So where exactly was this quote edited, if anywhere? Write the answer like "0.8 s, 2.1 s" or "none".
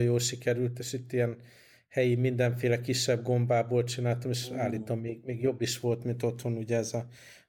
none